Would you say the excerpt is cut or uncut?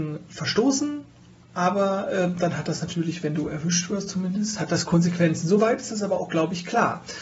uncut